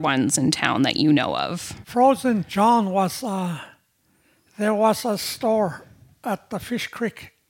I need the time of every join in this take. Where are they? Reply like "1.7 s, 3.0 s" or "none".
1.8 s